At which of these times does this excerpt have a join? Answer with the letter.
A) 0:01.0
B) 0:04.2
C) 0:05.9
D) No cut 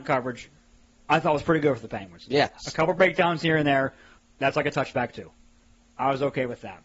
B